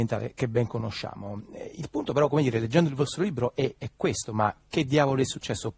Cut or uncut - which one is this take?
uncut